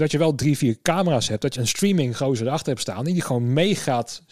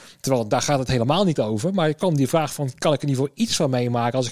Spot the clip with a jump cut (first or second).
first